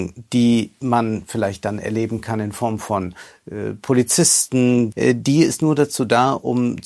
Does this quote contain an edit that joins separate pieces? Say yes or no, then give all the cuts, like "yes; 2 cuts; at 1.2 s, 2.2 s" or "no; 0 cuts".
yes; 1 cut; at 4.9 s